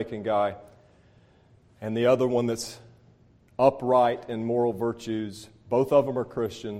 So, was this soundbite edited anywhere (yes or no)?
no